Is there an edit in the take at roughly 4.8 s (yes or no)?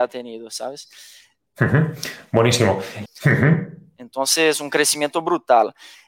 no